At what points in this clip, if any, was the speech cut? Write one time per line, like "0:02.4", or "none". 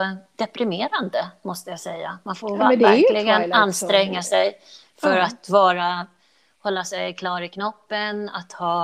none